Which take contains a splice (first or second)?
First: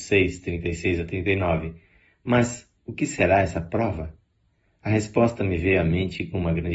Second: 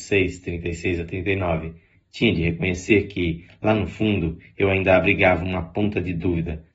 second